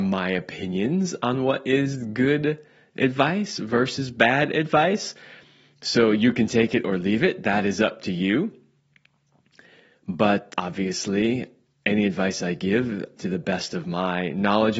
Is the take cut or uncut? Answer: cut